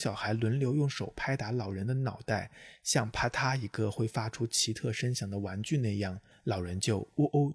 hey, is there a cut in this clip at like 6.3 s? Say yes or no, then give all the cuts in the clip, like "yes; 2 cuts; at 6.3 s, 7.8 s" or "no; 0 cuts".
yes; 1 cut; at 6.3 s